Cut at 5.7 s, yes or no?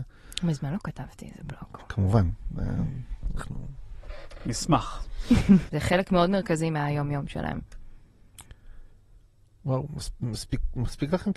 yes